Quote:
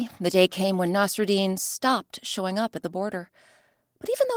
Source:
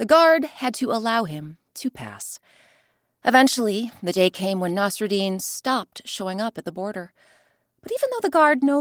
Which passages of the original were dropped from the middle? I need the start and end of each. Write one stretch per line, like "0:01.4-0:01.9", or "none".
none

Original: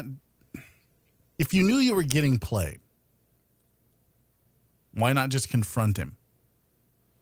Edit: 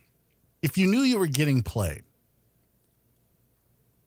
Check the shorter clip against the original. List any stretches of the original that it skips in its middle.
none

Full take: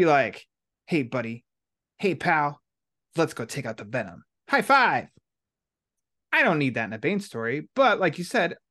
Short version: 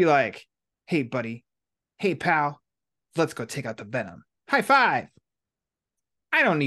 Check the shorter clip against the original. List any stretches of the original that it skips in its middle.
none

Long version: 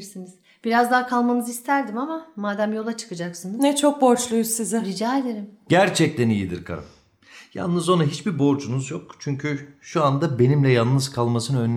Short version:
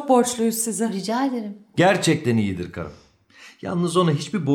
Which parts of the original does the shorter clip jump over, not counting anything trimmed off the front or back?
none

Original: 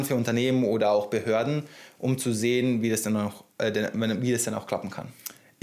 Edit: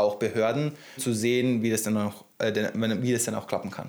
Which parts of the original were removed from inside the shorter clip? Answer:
0:01.9-0:02.2

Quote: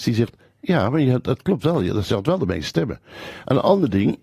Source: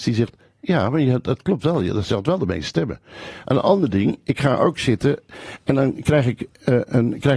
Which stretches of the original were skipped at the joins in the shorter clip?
none

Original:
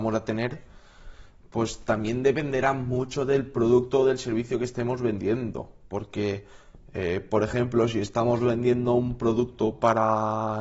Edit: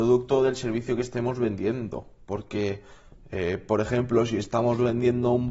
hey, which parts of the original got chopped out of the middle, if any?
none

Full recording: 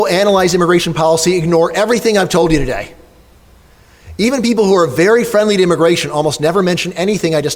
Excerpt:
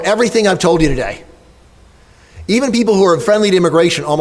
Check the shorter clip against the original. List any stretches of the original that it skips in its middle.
0:04.9-0:05.2

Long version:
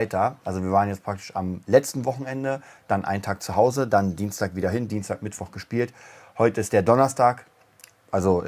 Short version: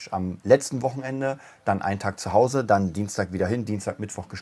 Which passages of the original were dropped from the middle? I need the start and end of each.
none

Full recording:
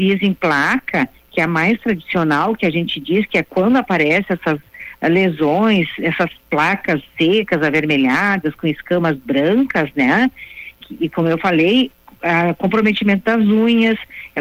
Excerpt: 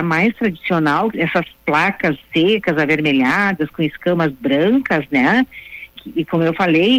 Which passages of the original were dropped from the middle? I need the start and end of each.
0:02.6-0:06.0

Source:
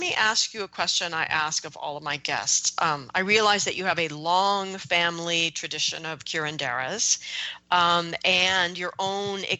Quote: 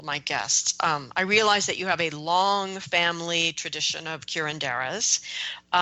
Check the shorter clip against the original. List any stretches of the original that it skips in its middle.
none

